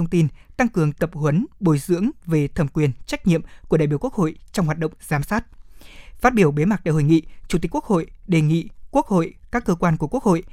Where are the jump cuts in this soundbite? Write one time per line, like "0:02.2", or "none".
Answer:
none